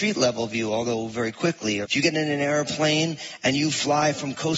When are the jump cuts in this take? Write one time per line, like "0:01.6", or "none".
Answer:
0:01.8

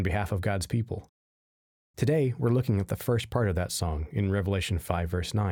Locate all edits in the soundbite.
none

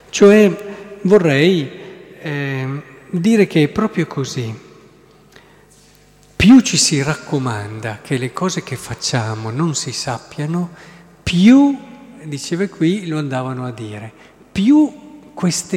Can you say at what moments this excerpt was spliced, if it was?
none

